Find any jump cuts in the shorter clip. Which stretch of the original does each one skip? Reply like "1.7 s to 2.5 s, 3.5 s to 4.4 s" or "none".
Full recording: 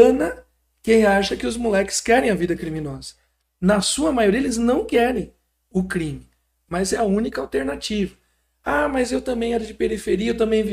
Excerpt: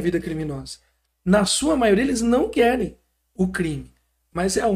none